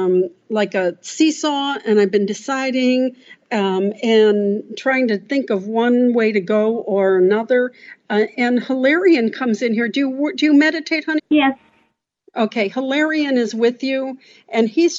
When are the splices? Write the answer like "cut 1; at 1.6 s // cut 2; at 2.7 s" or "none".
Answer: cut 1; at 11.2 s